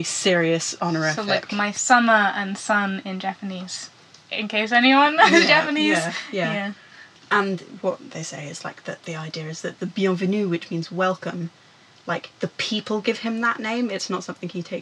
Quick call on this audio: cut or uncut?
uncut